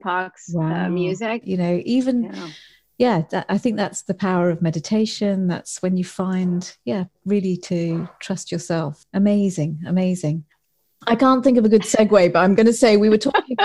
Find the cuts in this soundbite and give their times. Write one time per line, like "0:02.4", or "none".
0:01.4